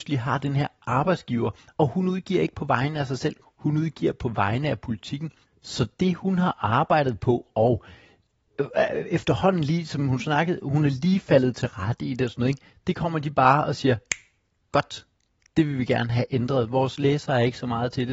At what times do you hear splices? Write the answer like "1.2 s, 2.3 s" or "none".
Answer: none